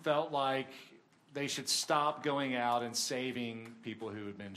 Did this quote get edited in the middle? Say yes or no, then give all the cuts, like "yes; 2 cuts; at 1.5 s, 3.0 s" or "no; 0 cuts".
no; 0 cuts